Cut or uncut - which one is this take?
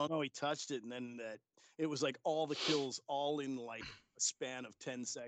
uncut